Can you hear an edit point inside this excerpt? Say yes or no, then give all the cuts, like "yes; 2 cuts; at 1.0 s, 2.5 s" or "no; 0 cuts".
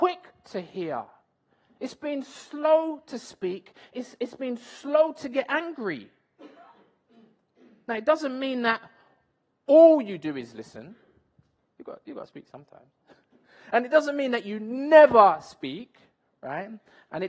no; 0 cuts